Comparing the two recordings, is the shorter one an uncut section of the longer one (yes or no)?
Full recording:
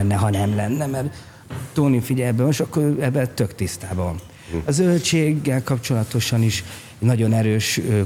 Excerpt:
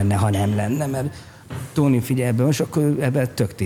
yes